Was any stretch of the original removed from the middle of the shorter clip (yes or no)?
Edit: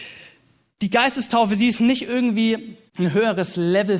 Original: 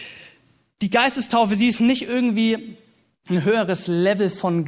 yes